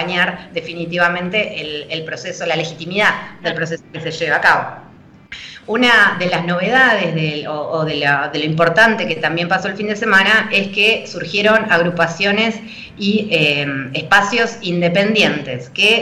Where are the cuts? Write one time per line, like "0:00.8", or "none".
none